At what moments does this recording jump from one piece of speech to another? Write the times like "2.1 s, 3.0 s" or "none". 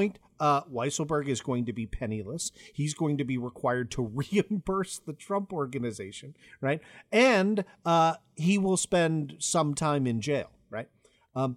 none